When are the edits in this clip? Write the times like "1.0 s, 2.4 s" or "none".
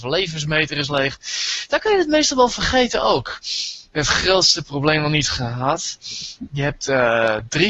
3.9 s